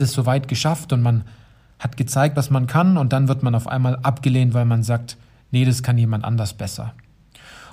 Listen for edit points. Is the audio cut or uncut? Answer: uncut